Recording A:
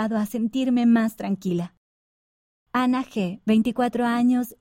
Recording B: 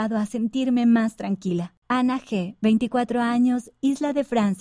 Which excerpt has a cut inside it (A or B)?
B